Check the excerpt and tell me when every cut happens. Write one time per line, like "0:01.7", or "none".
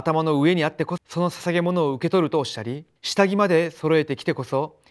0:01.0
0:03.0